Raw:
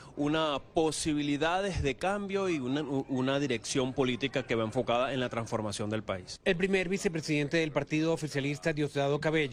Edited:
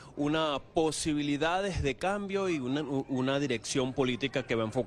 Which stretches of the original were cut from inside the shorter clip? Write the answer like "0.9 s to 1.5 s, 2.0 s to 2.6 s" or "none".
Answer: none